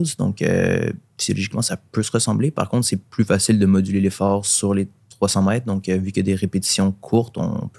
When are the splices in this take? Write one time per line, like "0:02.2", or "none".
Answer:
none